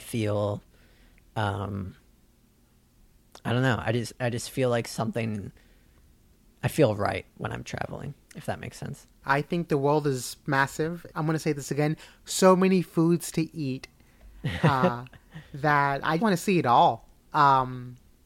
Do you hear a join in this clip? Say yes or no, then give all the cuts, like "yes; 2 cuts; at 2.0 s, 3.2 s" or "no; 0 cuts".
yes; 3 cuts; at 9.2 s, 11.1 s, 16.2 s